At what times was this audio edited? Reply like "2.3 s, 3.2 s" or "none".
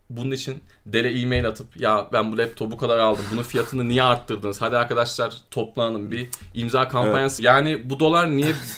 7.4 s